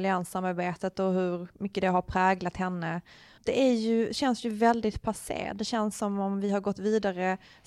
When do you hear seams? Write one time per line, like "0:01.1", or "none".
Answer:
0:03.4